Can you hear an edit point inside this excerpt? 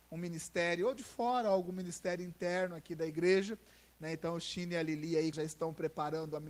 yes; 2 cuts; at 3.9 s, 5.3 s

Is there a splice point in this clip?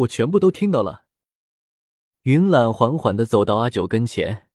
no; 0 cuts

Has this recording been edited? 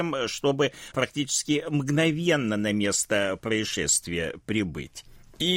yes; 1 cut; at 0.9 s

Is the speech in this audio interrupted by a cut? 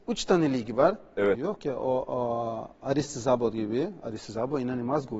yes; 1 cut; at 1.3 s

